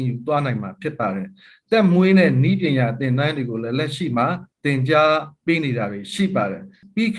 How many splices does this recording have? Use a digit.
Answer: 1